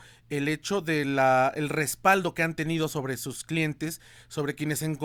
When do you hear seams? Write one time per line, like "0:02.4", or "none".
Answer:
none